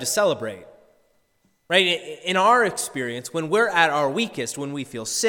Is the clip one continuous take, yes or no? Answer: yes